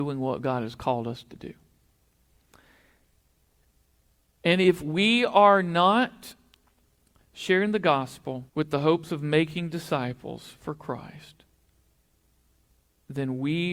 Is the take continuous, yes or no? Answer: no